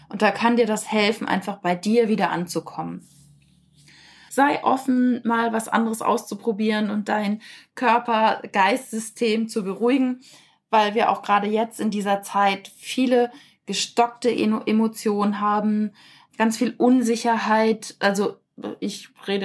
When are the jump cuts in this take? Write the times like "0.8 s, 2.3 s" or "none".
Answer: 4.3 s, 16.3 s